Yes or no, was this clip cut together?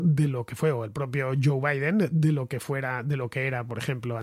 no